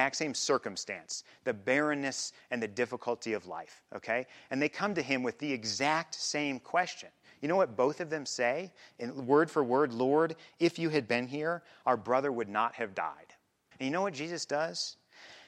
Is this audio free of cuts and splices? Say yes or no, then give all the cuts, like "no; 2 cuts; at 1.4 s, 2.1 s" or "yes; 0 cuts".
no; 1 cut; at 13.7 s